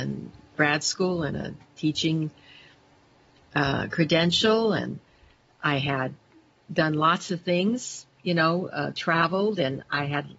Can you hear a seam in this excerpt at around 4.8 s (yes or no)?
no